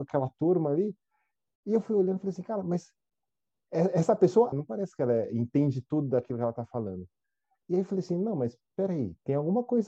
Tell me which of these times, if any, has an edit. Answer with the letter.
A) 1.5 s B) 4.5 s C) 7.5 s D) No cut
B